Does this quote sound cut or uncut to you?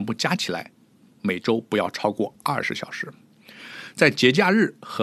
uncut